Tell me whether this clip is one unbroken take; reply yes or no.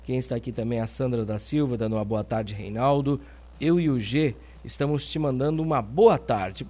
yes